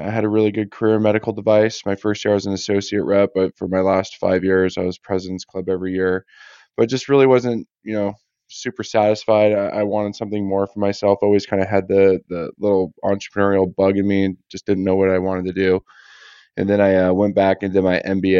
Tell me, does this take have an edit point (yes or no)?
no